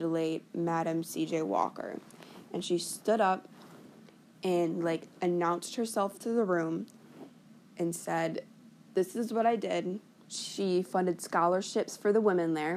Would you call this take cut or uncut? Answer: cut